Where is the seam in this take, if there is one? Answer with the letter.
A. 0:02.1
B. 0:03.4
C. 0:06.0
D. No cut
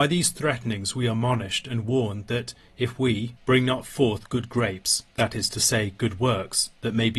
B